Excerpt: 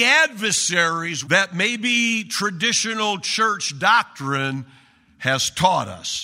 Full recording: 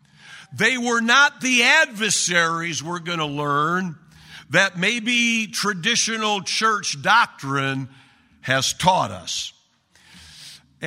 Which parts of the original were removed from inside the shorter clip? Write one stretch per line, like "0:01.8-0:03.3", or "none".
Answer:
0:02.8-0:04.5